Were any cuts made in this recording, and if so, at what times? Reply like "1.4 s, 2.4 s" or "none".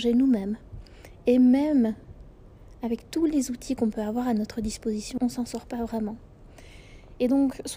5.2 s